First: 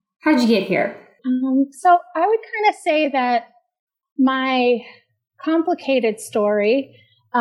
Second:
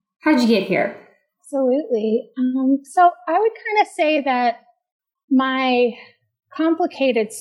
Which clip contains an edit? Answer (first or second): first